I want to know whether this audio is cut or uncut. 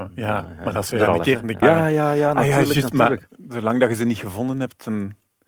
cut